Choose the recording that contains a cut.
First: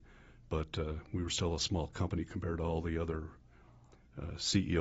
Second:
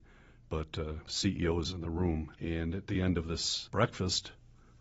second; 3 cuts; at 1.1 s, 2.3 s, 3.7 s

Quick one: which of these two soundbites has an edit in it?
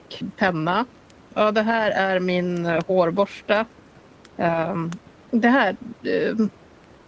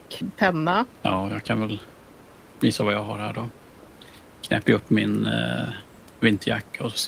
second; 1 cut; at 1.0 s

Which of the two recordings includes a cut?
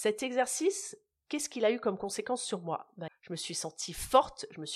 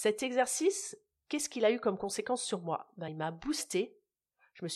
first; 1 cut; at 3.1 s

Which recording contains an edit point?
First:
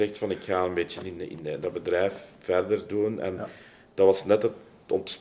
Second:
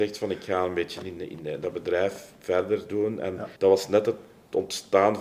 second; 1 cut; at 3.6 s

